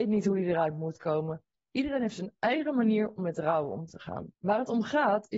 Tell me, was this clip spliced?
yes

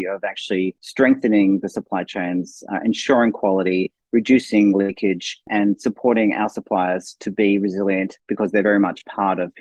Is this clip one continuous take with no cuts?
yes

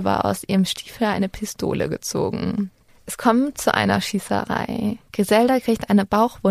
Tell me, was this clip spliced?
yes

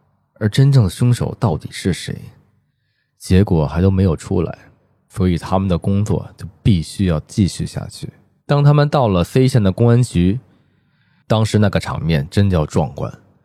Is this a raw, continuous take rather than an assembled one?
no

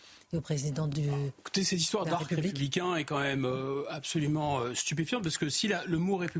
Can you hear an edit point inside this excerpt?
no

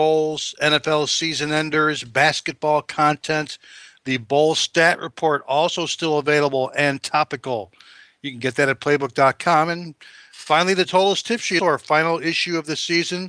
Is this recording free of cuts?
no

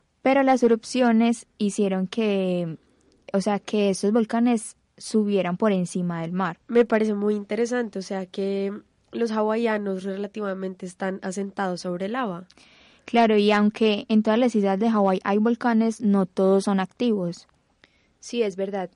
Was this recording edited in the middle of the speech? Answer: no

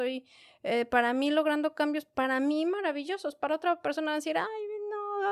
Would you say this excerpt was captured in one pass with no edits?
yes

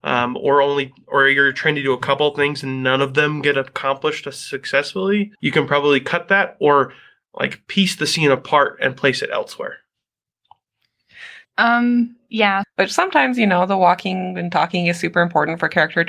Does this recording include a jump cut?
yes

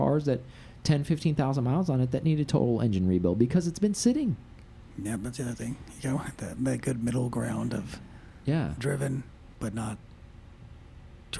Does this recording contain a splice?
no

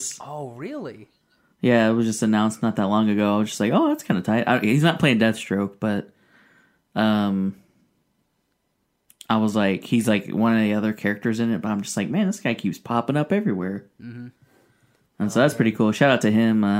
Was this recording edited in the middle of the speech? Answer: no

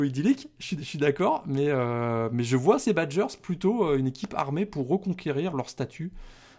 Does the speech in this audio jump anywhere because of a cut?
no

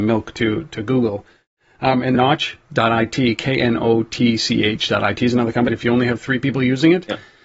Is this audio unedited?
no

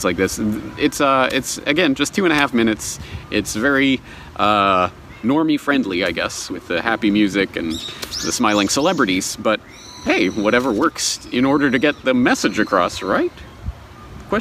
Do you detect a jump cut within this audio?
no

